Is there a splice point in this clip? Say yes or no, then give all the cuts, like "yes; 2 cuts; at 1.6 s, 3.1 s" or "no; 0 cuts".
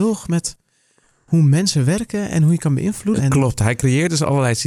yes; 1 cut; at 3.2 s